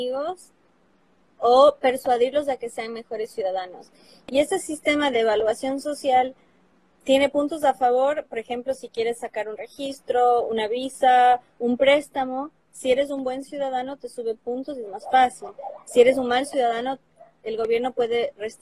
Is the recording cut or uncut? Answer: uncut